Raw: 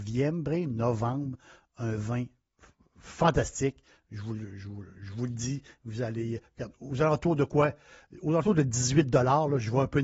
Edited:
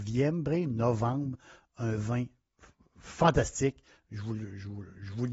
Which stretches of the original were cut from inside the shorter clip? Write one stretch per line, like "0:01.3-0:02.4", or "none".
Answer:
none

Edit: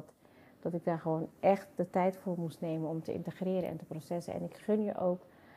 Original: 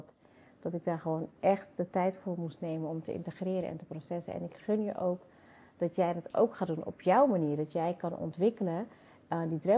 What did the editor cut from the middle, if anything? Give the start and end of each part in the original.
none

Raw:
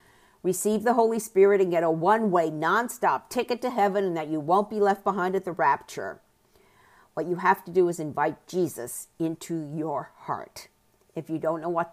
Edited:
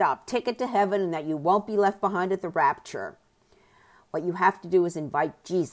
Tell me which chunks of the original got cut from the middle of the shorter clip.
none

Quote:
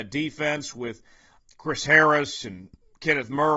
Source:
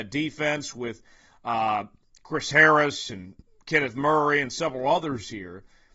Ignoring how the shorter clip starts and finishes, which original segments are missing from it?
0:01.4-0:02.0

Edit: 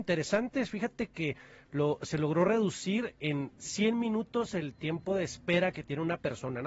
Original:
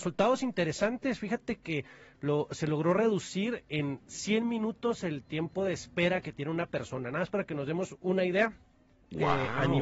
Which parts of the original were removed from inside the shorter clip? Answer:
none

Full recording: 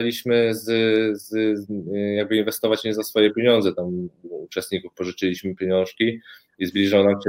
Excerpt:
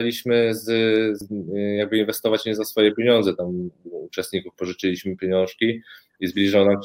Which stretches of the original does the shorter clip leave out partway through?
0:01.2-0:01.6

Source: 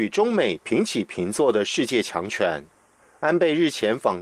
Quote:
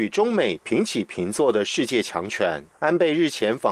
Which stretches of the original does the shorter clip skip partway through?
0:02.7-0:03.1

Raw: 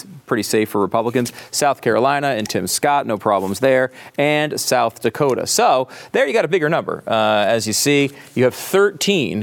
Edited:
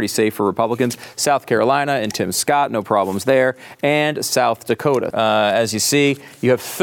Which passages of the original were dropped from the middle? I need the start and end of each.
0:05.5-0:07.0

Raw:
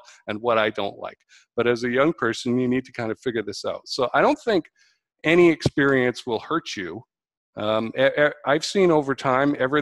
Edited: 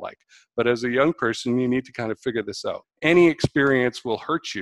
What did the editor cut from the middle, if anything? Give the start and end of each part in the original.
0:03.8-0:05.0

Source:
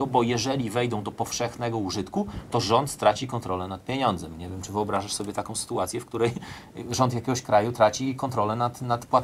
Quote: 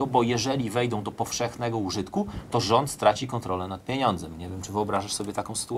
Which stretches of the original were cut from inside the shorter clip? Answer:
none

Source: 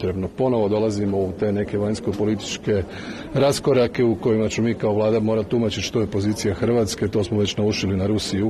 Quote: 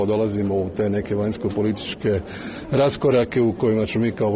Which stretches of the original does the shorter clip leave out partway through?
none

